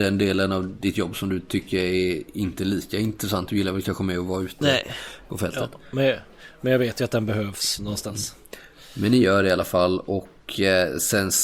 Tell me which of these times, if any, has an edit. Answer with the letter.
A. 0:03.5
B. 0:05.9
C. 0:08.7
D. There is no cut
D